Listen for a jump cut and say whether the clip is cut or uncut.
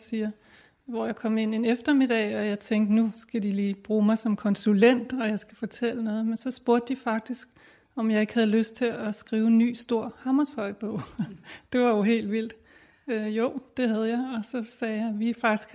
uncut